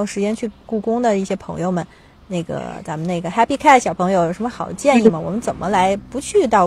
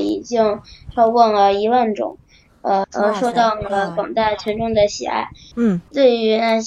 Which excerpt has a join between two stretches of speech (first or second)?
second